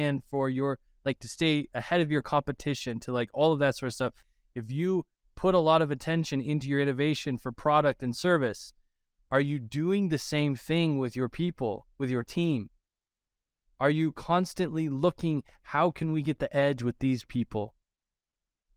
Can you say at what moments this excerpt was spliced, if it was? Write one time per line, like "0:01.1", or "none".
none